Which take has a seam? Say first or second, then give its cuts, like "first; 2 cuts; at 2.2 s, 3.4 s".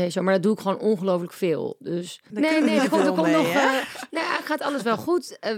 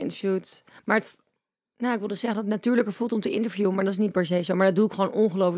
first; 1 cut; at 2.3 s